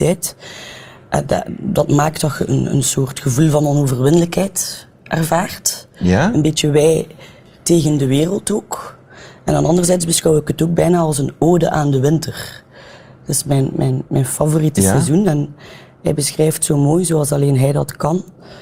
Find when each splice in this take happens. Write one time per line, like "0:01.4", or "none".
none